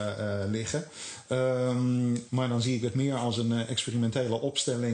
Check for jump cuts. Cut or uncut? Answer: cut